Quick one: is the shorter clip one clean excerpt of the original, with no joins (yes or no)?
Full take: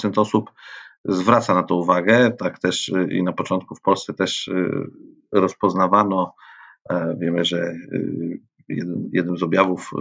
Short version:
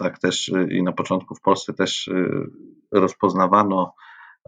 yes